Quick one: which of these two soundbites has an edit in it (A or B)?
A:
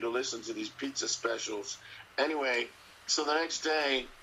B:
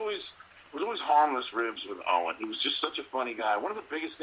A